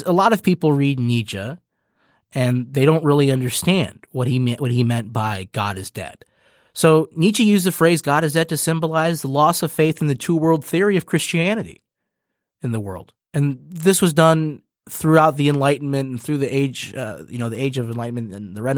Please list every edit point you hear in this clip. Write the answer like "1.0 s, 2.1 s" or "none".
none